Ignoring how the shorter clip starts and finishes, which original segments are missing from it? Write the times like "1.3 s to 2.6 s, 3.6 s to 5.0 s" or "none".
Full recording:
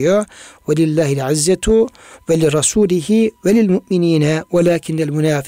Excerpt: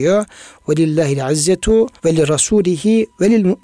2.0 s to 2.2 s